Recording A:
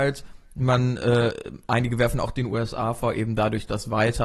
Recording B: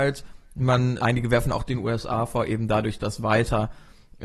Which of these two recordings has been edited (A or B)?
B